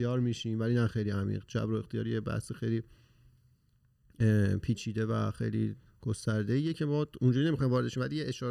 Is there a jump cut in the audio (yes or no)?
no